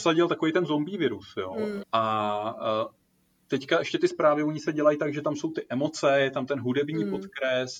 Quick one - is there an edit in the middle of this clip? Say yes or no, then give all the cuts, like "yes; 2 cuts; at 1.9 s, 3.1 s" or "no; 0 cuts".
yes; 1 cut; at 1.8 s